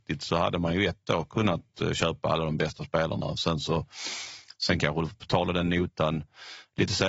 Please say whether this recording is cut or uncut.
uncut